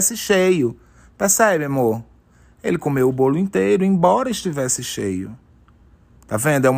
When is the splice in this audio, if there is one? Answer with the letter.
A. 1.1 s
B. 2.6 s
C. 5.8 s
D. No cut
D